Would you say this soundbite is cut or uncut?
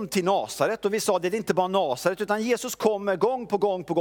uncut